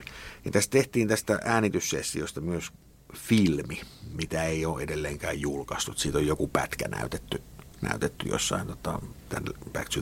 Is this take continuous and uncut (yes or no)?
yes